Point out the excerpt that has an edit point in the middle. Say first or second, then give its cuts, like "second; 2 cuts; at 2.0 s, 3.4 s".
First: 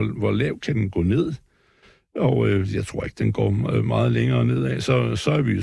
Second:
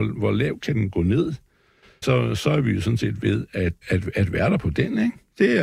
second; 2 cuts; at 2.0 s, 3.8 s